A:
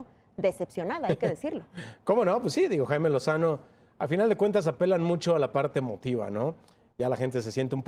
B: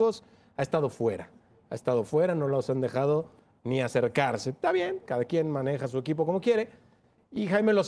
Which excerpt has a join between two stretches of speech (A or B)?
A